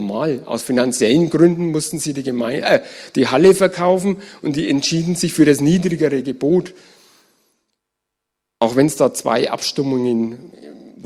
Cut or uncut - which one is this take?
uncut